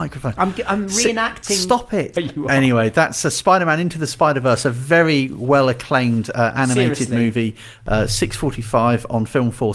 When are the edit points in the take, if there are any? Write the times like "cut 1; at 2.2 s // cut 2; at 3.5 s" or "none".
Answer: cut 1; at 2.1 s